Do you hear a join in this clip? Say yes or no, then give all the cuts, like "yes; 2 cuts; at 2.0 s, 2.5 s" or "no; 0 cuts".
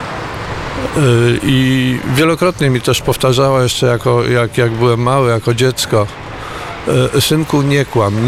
no; 0 cuts